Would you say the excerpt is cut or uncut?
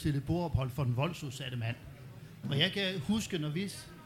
cut